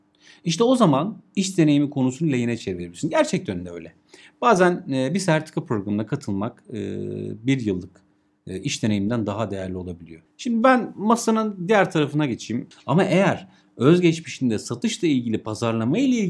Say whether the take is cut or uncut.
cut